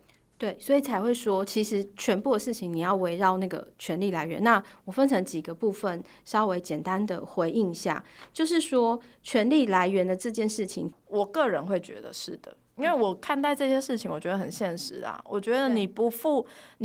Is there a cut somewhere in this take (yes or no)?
yes